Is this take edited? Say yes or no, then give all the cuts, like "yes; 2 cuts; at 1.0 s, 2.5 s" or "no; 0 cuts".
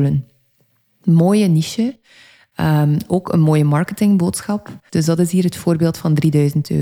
yes; 1 cut; at 4.9 s